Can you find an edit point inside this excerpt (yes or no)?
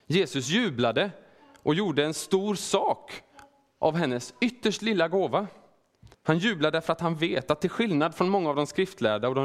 yes